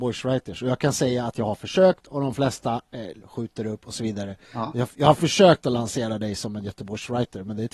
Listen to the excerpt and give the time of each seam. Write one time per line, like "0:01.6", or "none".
0:03.2